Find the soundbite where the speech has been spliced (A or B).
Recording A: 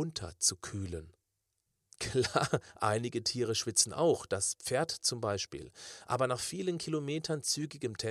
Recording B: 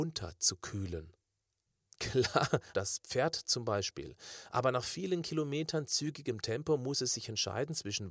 B